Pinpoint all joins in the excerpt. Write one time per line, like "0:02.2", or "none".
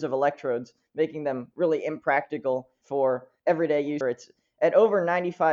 0:04.0